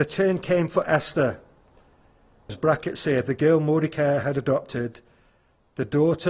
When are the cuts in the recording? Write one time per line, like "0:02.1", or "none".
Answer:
0:02.5